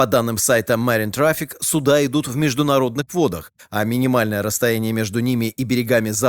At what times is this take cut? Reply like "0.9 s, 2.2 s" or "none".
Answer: none